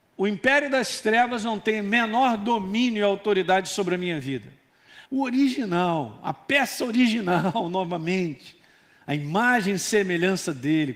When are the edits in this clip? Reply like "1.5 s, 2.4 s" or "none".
5.0 s